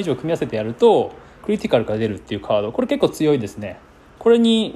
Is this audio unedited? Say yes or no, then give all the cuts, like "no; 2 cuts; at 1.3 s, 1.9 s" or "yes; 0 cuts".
no; 1 cut; at 1.4 s